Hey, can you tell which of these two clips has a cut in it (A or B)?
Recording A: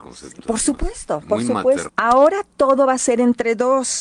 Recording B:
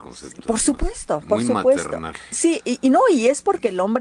A